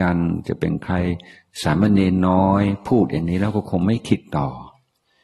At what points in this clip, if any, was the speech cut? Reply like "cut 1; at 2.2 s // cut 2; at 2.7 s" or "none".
none